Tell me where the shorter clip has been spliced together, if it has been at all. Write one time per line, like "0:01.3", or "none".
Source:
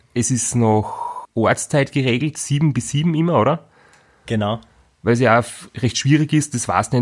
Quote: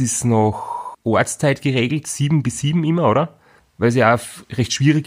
0:03.6